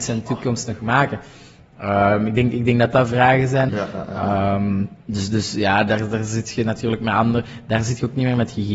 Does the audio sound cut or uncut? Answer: cut